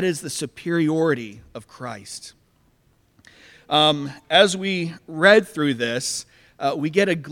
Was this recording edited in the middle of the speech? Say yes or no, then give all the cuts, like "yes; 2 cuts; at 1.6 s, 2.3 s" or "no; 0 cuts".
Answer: yes; 1 cut; at 3.5 s